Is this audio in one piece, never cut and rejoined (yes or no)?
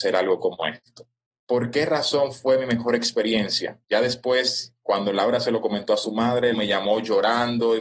no